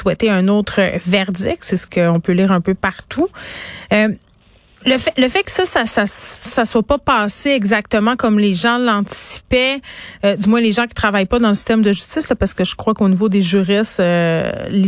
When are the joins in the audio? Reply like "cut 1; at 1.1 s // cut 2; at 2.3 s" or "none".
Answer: none